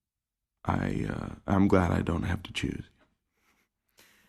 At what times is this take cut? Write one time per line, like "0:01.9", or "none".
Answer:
none